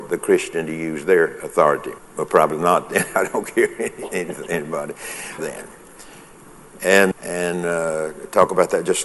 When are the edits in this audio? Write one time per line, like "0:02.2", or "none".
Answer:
0:02.0
0:05.4
0:07.1